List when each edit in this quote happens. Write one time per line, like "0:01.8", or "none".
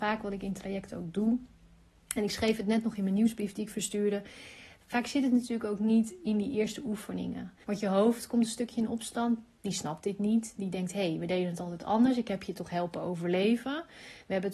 0:07.6